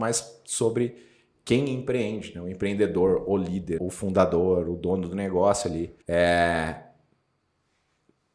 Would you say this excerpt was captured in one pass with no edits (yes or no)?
no